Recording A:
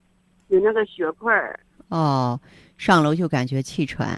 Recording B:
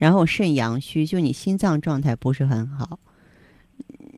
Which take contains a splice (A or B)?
A